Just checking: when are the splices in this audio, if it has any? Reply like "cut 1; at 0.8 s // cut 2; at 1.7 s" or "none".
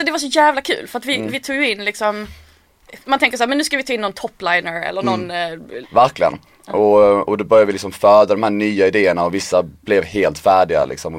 cut 1; at 3.1 s // cut 2; at 5.8 s